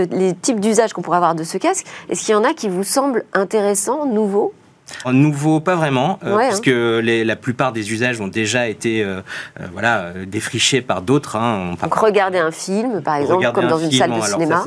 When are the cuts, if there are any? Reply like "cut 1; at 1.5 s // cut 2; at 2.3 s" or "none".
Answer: cut 1; at 5.0 s